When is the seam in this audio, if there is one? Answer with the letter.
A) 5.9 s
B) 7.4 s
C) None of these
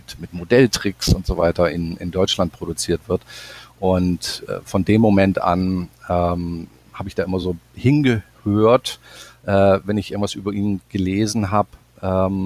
C